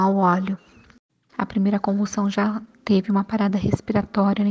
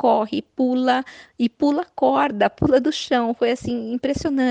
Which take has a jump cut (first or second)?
first